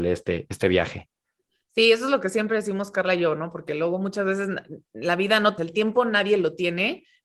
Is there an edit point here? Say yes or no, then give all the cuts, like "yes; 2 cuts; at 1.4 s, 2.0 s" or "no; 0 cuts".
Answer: yes; 1 cut; at 5.6 s